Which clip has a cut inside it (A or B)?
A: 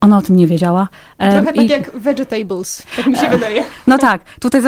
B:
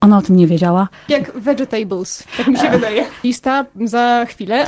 B